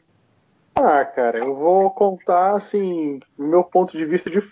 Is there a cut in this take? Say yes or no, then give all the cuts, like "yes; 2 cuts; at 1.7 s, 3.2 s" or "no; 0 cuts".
no; 0 cuts